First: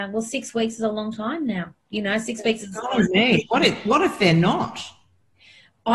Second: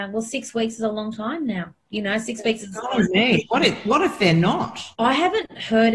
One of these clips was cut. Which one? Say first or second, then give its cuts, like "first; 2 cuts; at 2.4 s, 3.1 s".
second; 1 cut; at 4.9 s